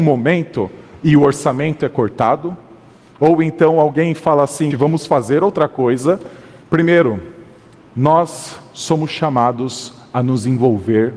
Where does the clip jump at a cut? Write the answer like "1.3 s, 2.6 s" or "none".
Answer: 4.7 s, 6.6 s